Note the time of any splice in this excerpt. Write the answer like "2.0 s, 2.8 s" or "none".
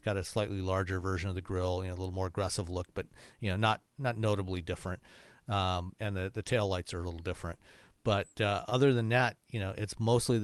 none